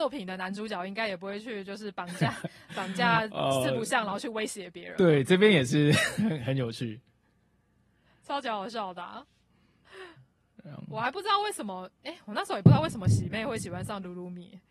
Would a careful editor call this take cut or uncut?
uncut